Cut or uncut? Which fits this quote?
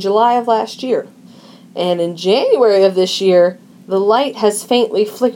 cut